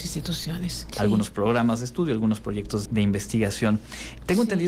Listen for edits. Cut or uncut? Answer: cut